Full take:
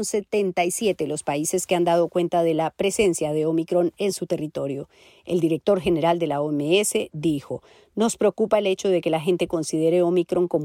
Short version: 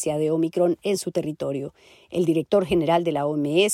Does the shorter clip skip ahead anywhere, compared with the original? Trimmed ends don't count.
no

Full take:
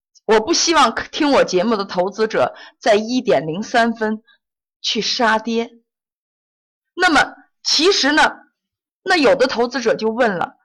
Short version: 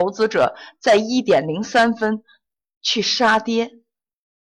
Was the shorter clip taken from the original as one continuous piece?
yes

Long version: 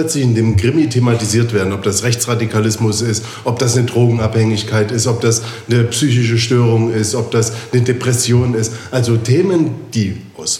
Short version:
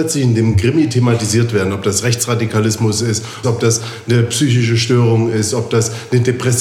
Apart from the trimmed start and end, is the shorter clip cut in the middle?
yes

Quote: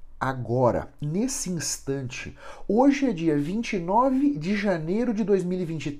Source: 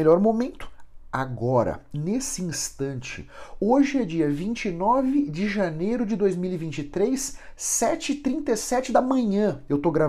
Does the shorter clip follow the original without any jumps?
yes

